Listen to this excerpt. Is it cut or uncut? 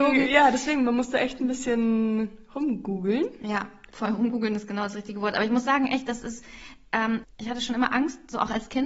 cut